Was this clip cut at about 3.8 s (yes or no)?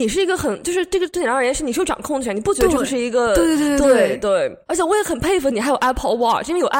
no